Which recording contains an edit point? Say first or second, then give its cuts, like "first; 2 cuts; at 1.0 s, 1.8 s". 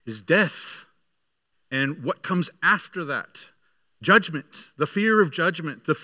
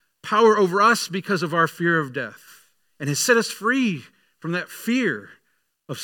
first; 1 cut; at 1.5 s